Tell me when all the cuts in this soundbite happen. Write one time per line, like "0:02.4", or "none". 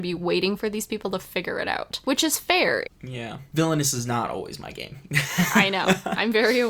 0:02.8